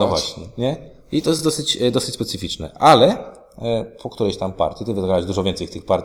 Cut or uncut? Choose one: uncut